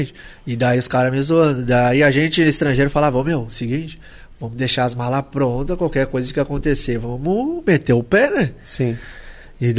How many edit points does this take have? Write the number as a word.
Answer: zero